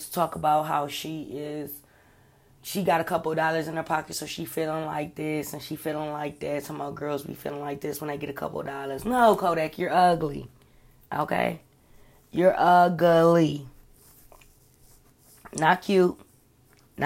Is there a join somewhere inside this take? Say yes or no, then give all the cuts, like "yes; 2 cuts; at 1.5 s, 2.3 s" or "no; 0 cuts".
no; 0 cuts